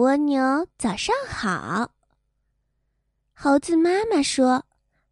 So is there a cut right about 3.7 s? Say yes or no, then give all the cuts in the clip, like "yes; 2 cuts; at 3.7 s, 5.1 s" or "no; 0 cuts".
no; 0 cuts